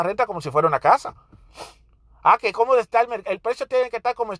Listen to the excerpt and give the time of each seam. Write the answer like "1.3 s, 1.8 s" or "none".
none